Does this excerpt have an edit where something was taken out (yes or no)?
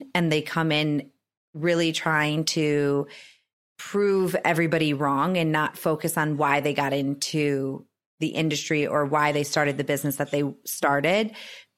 no